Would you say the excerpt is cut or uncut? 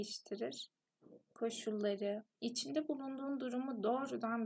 cut